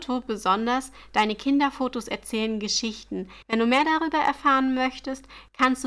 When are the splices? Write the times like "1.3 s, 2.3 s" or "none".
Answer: 3.4 s